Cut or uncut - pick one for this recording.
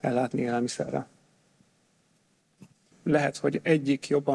cut